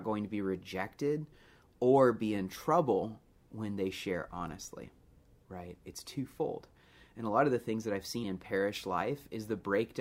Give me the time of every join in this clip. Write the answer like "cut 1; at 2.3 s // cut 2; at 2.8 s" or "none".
cut 1; at 8.2 s